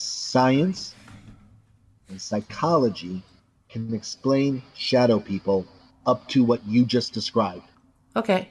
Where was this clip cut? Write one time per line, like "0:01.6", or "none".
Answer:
none